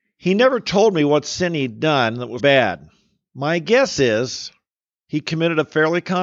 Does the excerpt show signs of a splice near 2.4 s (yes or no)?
yes